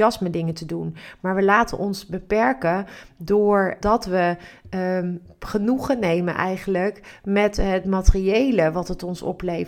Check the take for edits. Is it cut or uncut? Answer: cut